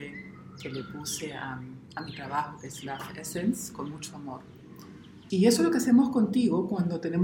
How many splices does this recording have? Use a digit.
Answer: 1